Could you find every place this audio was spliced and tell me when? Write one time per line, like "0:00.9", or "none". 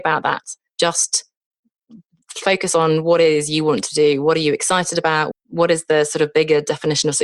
0:05.3